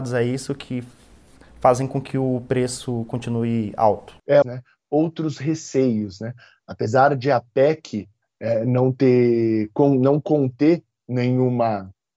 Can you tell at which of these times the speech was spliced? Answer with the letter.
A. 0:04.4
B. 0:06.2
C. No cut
A